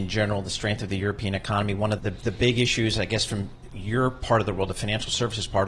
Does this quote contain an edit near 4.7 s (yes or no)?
no